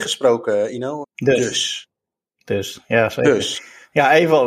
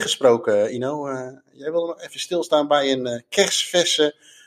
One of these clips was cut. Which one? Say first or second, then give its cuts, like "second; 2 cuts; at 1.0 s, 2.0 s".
first; 1 cut; at 1.0 s